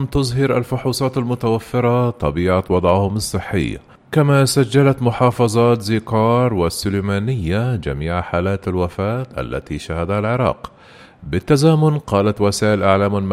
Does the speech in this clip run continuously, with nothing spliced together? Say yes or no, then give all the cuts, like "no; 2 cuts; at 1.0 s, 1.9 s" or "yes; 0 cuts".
yes; 0 cuts